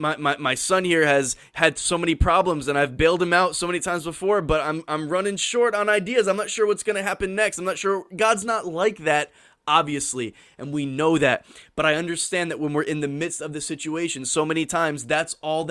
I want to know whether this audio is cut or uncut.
uncut